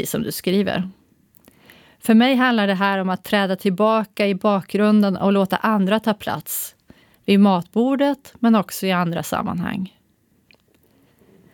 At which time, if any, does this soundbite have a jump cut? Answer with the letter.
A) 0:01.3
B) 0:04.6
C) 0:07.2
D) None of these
D